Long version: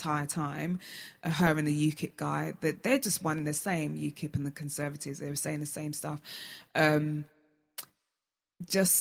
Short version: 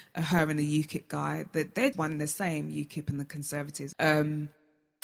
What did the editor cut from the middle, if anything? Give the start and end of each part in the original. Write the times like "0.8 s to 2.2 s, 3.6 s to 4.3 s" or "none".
3.0 s to 3.2 s, 5.2 s to 6.7 s